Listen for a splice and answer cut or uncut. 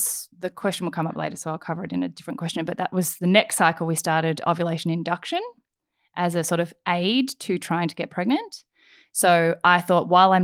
uncut